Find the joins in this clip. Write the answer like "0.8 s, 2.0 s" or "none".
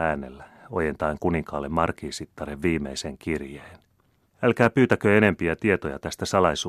4.3 s